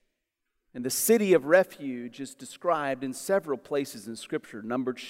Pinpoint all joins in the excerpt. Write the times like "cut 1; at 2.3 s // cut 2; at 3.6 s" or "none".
none